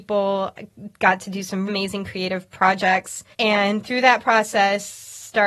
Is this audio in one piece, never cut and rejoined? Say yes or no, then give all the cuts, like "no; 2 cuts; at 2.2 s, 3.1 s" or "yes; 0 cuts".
no; 2 cuts; at 1.7 s, 3.3 s